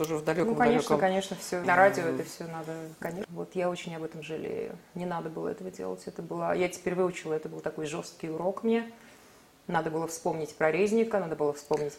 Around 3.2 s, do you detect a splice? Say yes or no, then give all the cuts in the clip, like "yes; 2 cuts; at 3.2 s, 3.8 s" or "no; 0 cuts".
yes; 2 cuts; at 1.6 s, 3.2 s